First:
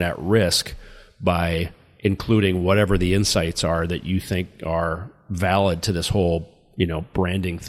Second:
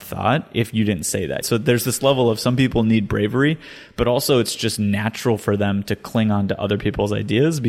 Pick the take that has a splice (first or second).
second